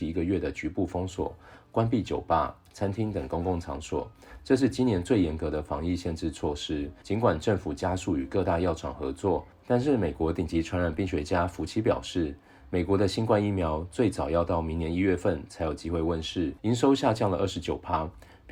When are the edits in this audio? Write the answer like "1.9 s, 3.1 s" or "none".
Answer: 7.0 s, 16.6 s

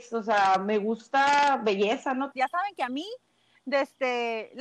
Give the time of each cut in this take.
2.3 s

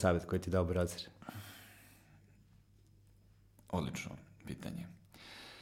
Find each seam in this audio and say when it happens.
none

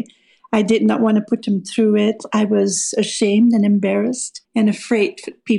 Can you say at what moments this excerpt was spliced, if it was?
4.4 s

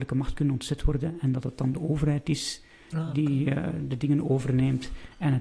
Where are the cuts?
none

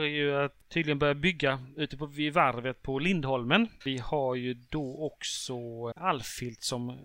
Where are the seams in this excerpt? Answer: 3.8 s, 5.9 s

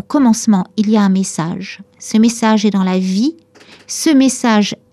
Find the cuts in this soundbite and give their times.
none

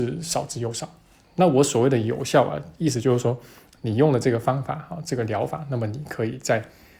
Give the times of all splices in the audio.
none

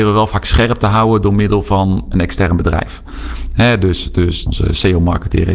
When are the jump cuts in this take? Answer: 4.5 s

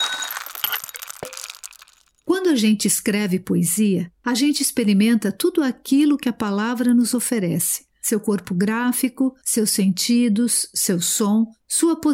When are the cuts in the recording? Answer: none

